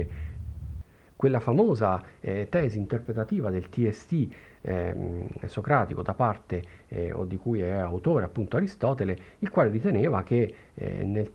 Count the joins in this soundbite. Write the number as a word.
zero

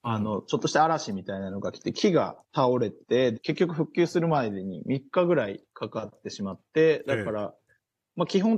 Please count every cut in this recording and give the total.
one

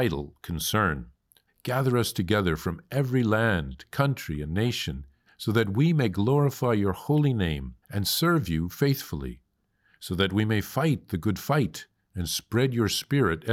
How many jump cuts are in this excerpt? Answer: three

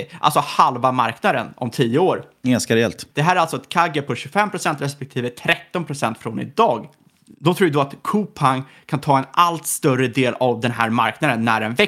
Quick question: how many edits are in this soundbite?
one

